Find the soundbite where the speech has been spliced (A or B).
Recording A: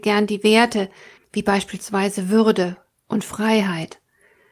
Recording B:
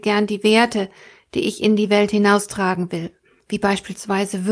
A